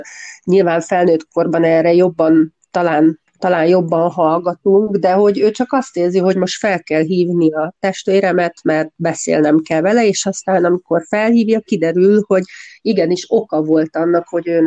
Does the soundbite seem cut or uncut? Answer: cut